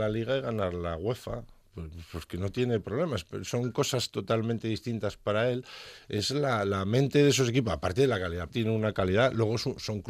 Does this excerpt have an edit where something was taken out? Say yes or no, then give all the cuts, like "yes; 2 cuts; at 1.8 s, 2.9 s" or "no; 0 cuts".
yes; 2 cuts; at 6.0 s, 8.5 s